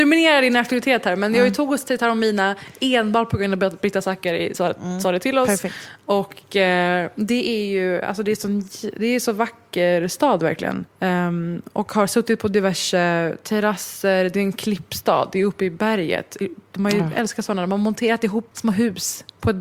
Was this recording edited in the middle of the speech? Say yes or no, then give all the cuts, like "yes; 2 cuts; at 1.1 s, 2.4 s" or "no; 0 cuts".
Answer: yes; 2 cuts; at 10.9 s, 18.5 s